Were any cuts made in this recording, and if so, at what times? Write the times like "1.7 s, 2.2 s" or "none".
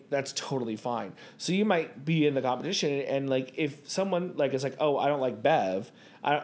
none